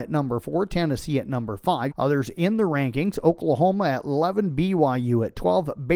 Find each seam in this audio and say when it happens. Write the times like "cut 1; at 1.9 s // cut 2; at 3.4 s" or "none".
cut 1; at 1.9 s